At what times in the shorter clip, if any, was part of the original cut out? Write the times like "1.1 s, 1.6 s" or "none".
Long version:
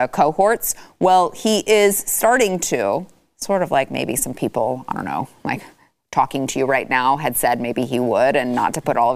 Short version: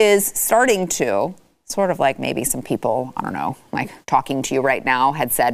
4.0 s